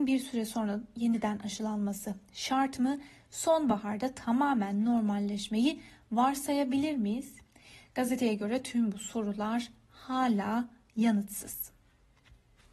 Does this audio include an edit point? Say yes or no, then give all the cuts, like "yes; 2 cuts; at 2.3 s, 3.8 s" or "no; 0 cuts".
no; 0 cuts